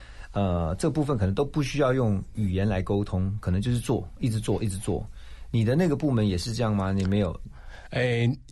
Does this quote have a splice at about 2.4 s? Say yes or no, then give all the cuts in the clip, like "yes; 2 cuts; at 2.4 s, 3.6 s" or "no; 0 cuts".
yes; 1 cut; at 2.4 s